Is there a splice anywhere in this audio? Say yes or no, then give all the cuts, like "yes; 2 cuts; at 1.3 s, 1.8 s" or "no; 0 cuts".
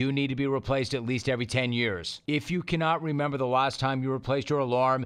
no; 0 cuts